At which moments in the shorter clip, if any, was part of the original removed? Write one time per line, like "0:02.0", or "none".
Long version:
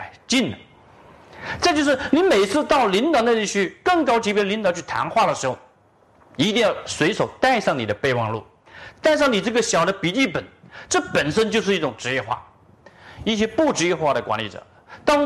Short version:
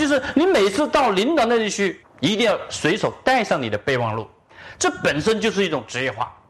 0:02.0
0:04.8